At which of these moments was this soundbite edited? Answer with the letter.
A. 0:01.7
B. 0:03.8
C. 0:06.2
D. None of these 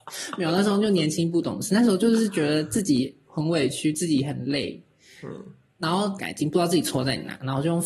C